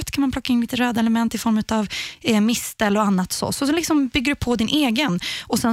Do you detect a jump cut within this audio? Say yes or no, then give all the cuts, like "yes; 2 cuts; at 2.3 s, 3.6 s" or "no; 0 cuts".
no; 0 cuts